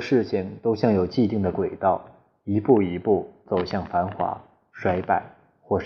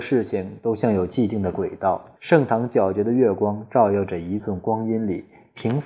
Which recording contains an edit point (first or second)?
second